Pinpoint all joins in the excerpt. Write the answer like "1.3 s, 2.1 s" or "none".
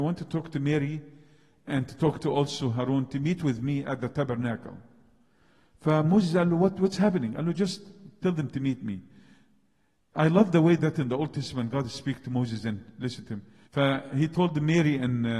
13.7 s